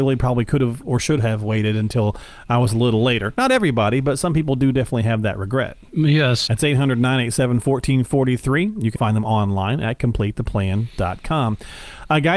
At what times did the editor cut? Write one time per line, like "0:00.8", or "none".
0:06.5
0:09.0